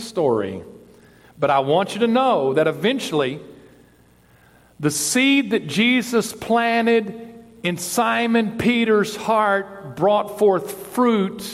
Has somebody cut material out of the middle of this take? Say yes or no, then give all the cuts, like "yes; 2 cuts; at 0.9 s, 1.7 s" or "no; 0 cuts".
no; 0 cuts